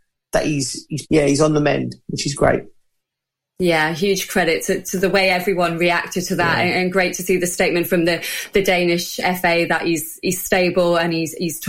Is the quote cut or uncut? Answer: uncut